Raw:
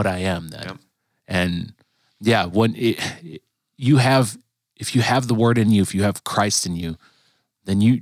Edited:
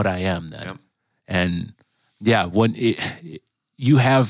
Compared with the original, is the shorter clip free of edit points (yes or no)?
yes